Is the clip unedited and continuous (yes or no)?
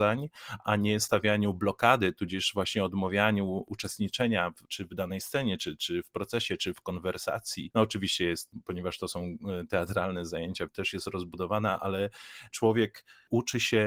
no